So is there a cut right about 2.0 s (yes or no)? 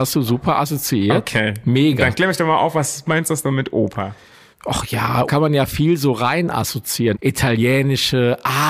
no